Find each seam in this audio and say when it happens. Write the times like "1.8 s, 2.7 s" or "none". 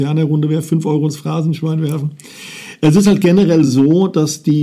none